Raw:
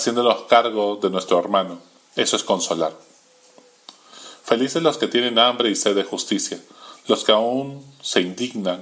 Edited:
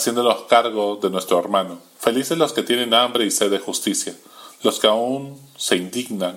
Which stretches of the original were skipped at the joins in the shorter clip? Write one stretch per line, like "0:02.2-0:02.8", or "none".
0:01.9-0:04.4